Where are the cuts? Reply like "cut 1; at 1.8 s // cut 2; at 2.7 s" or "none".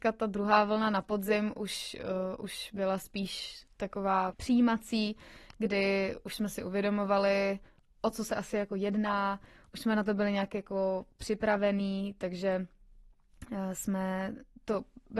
cut 1; at 4.3 s